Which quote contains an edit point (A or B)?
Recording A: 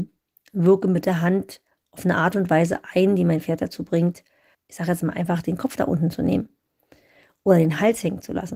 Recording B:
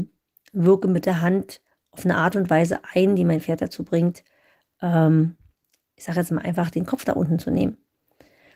A